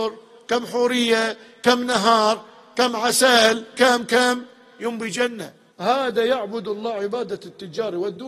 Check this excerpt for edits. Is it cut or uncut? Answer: cut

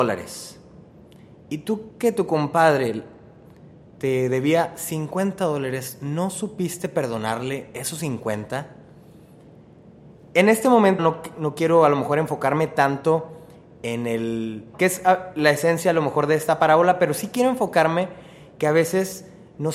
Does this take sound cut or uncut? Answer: cut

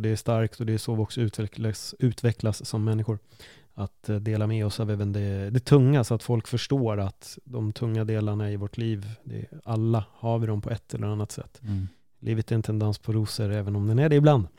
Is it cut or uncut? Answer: uncut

